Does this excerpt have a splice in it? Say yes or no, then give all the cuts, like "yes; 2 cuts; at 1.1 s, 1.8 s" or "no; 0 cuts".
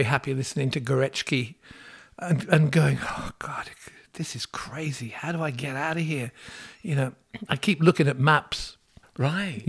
no; 0 cuts